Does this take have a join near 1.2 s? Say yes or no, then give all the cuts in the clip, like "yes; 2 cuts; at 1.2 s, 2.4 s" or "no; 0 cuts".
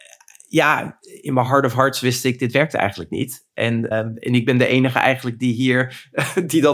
no; 1 cut; at 3.9 s